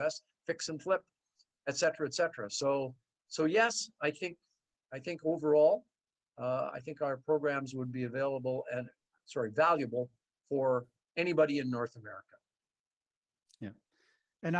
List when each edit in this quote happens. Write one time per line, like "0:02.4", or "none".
none